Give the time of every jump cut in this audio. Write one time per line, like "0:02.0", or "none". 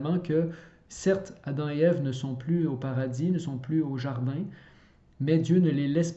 none